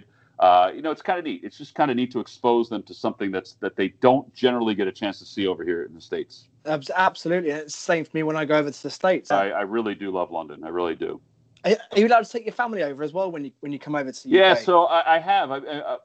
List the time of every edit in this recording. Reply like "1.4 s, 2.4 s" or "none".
9.3 s